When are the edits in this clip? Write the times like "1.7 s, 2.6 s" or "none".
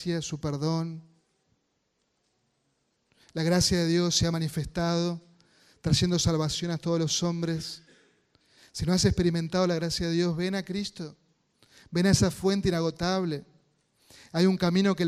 none